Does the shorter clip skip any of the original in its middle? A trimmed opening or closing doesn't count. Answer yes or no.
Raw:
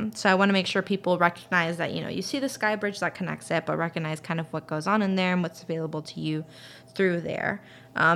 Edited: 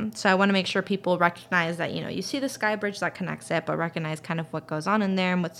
no